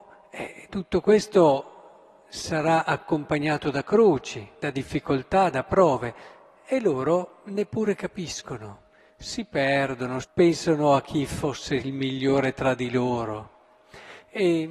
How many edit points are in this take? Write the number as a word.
one